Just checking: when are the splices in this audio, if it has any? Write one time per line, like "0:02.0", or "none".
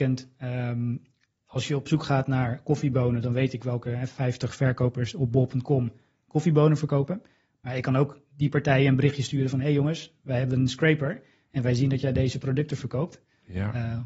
none